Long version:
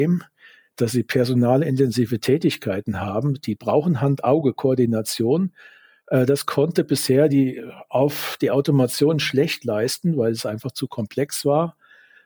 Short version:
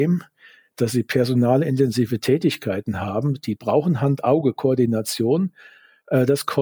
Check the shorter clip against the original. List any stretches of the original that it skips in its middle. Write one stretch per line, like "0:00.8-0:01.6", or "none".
none